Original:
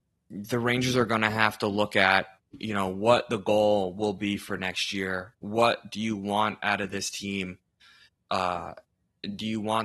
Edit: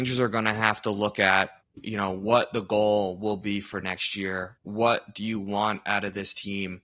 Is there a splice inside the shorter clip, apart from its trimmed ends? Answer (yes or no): no